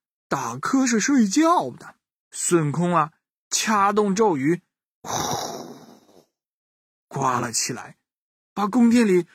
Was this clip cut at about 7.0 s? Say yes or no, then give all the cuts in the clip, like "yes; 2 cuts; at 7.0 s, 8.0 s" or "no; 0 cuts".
yes; 2 cuts; at 2.2 s, 7.0 s